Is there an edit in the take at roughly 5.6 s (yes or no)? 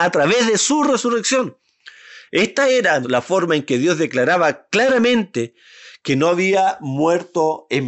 no